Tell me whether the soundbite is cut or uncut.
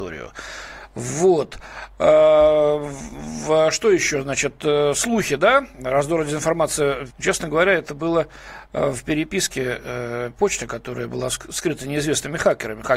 cut